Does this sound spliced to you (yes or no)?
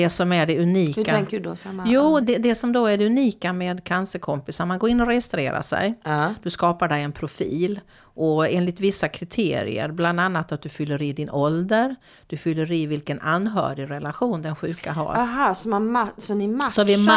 yes